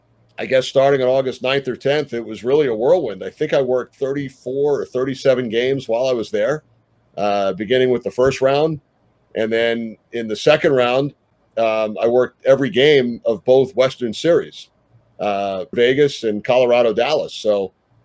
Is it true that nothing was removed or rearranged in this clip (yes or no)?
no